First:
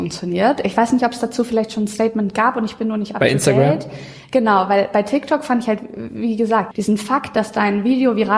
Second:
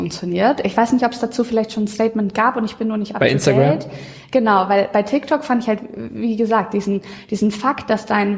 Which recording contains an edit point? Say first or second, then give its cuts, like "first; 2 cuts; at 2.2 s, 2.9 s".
first; 1 cut; at 6.7 s